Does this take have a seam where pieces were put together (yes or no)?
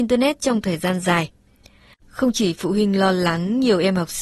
yes